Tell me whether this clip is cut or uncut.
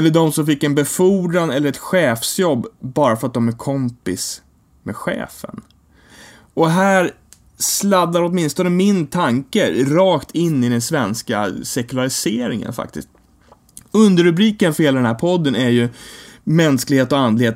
uncut